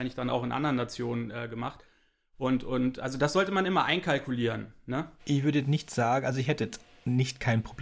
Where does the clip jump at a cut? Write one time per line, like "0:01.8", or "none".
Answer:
none